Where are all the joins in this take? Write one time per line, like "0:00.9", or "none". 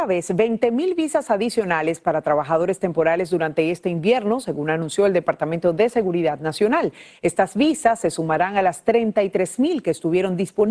none